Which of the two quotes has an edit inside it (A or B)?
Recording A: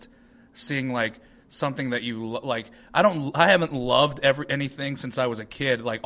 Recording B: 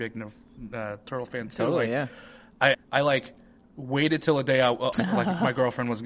B